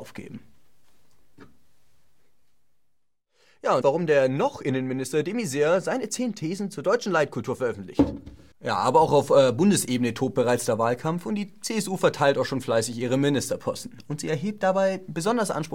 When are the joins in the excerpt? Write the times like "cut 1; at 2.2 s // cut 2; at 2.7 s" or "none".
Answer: cut 1; at 3.8 s // cut 2; at 8.5 s

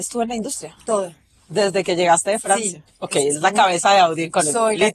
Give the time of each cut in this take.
cut 1; at 2.9 s

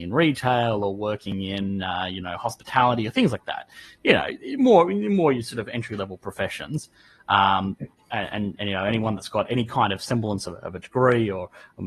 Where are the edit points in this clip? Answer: none

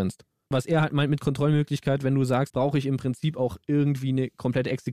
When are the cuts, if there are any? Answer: cut 1; at 2.5 s

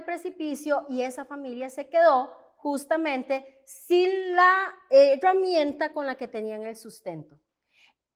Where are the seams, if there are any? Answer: none

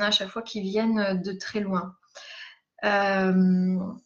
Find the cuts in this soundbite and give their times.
none

